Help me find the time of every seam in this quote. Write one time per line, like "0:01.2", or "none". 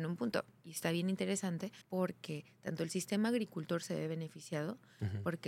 0:01.8